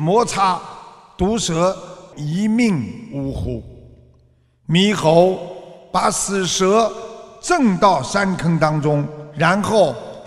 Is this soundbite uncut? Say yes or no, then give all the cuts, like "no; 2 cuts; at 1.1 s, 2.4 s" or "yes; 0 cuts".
no; 1 cut; at 2.1 s